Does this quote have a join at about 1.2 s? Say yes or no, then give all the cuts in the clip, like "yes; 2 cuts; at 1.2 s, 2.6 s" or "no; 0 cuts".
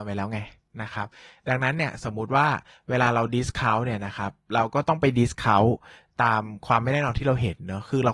no; 0 cuts